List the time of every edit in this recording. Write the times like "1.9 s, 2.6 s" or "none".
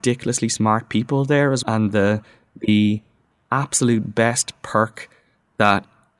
1.6 s